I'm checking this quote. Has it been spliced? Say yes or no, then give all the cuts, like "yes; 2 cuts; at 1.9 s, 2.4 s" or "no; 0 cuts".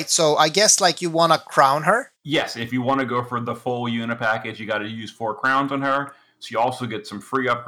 yes; 1 cut; at 2.1 s